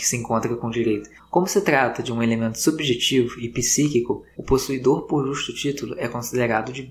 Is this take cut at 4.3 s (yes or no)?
yes